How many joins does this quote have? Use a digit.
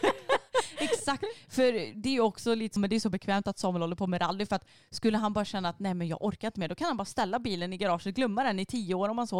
1